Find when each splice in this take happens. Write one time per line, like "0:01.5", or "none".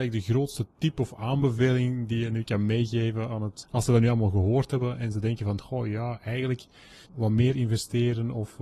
0:03.6
0:07.1